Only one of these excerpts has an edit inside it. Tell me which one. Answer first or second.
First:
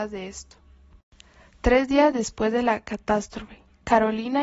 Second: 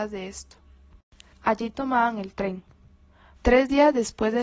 second